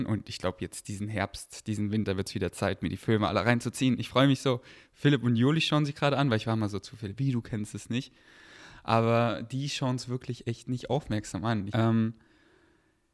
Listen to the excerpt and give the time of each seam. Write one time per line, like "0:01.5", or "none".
0:07.2
0:11.7